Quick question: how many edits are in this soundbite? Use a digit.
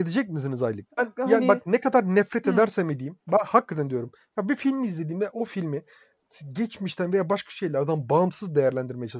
1